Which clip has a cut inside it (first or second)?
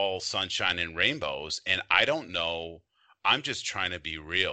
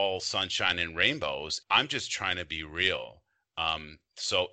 second